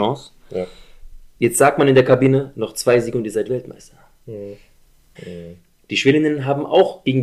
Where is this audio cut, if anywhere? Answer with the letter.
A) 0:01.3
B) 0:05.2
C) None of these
B